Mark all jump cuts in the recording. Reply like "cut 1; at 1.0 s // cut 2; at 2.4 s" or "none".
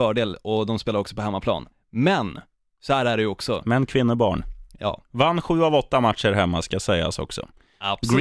cut 1; at 1.7 s